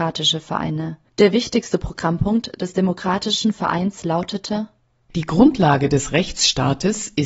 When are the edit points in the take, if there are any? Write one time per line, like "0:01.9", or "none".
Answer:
0:01.1